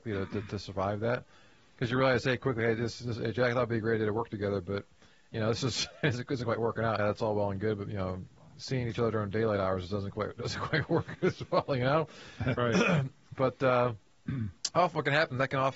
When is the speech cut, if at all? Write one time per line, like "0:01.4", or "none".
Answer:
0:07.0
0:12.6